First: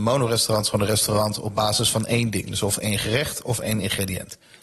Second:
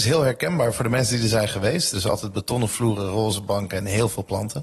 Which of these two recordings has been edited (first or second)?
second